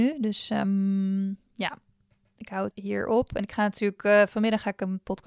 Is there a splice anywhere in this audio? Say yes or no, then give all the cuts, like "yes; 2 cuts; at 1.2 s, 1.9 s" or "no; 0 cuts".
yes; 1 cut; at 2.7 s